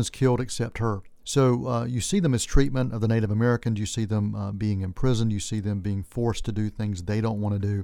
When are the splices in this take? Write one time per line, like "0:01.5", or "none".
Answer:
0:01.2

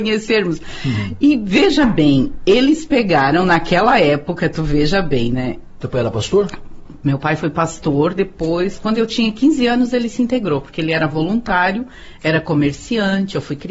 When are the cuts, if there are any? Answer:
0:05.8

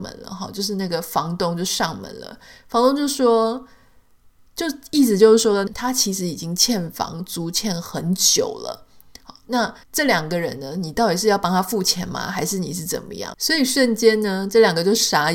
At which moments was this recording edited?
0:05.7
0:09.8
0:13.3

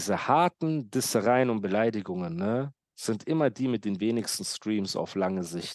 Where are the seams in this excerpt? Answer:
none

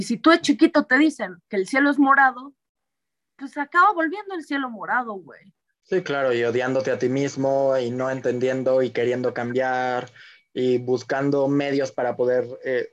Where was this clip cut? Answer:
0:05.7

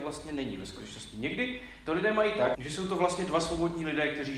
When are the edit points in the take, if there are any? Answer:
0:02.5

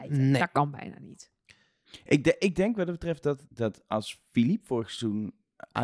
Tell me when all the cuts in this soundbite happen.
0:03.5

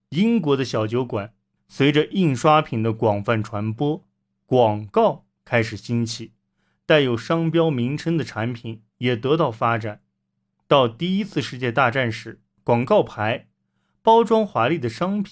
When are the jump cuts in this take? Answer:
0:01.6

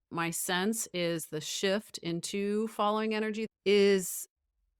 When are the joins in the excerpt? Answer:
0:03.5

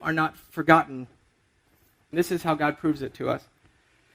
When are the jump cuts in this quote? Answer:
0:02.1

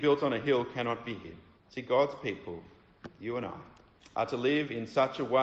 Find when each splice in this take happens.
none

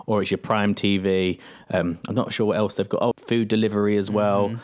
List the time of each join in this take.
0:03.1

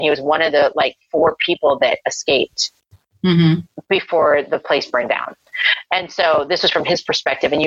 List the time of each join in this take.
none

